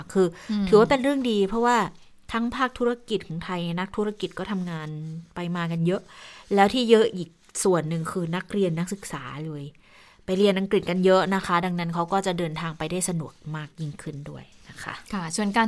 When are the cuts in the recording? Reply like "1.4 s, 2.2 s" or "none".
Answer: none